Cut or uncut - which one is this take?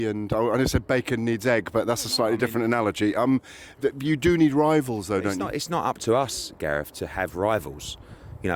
uncut